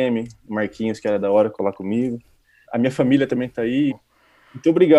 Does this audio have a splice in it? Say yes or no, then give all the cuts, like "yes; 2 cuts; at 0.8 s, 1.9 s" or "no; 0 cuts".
yes; 2 cuts; at 2.7 s, 3.9 s